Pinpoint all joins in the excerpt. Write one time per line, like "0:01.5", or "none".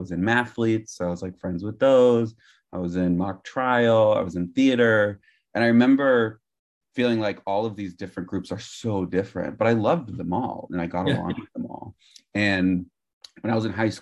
none